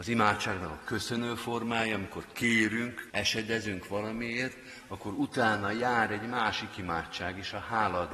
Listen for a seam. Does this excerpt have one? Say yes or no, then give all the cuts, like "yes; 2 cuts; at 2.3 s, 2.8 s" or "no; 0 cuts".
yes; 1 cut; at 3.1 s